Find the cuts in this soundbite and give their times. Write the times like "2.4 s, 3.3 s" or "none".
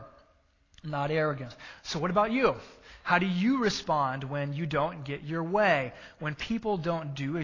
none